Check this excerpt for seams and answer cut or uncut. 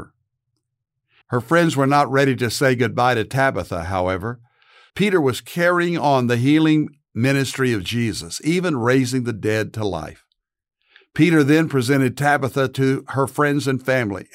cut